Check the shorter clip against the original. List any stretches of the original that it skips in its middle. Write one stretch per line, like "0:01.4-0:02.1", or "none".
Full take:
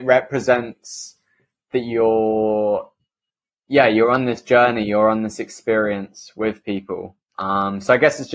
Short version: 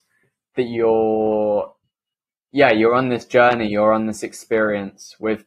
none